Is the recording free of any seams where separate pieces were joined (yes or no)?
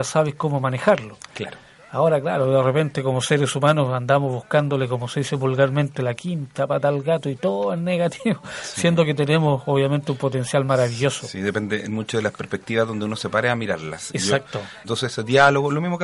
no